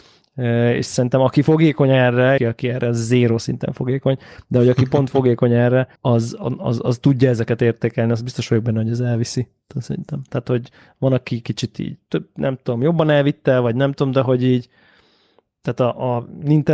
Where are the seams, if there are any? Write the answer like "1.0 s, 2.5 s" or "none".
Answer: 2.4 s, 6.0 s, 10.3 s